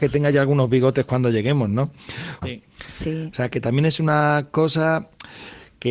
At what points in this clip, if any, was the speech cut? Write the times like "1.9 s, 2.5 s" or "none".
2.4 s